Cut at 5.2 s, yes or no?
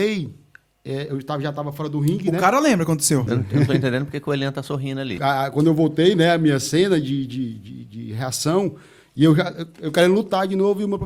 yes